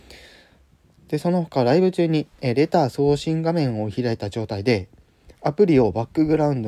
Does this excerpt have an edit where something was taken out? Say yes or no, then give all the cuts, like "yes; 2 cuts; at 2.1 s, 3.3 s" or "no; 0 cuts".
no; 0 cuts